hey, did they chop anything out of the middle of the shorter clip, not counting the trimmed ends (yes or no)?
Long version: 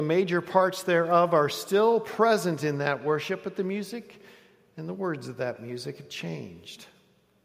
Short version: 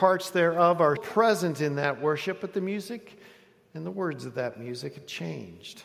yes